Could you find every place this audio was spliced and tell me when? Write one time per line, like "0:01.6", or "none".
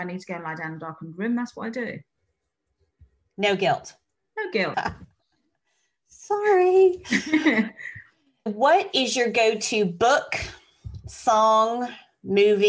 0:04.7
0:08.5